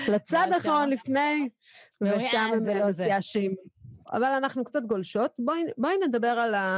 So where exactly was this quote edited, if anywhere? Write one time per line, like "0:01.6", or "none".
0:04.0